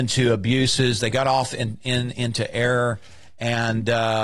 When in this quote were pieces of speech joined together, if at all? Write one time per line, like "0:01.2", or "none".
none